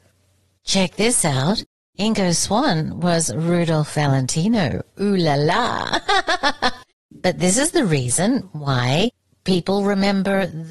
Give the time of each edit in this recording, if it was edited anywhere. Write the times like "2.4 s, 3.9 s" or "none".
none